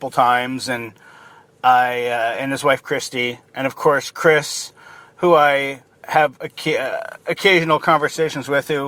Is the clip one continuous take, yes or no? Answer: yes